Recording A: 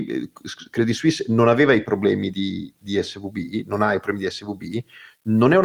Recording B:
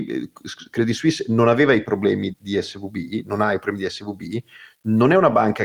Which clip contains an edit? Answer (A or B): B